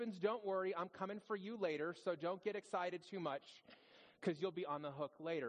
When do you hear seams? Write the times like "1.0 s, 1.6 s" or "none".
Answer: none